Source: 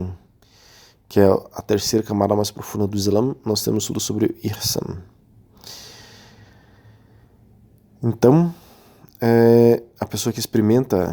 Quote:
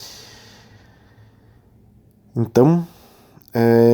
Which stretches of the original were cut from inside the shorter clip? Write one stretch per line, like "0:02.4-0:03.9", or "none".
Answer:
none